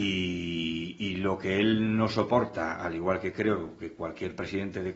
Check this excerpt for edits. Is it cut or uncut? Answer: uncut